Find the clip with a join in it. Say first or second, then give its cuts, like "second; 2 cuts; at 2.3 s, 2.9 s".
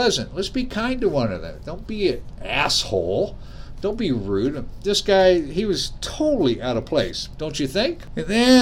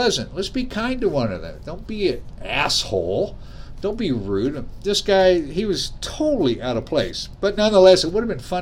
first; 1 cut; at 7.4 s